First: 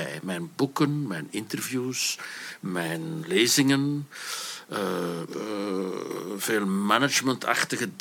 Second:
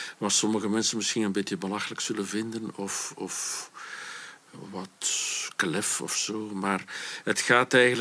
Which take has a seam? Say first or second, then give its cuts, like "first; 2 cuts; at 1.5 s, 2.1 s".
first; 2 cuts; at 3.2 s, 5.3 s